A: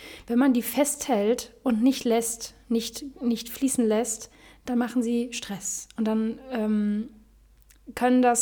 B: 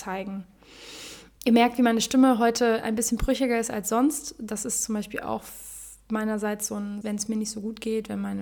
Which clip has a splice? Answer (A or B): B